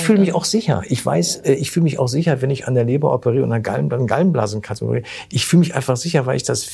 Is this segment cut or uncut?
uncut